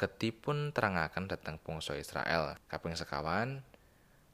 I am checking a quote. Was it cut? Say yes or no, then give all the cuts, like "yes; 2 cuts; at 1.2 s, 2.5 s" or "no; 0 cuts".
yes; 1 cut; at 2.6 s